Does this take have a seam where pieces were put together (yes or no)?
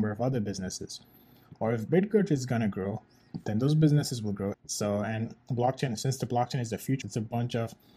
yes